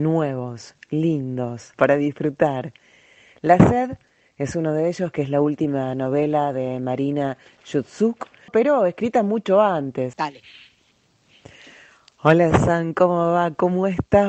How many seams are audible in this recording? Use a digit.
3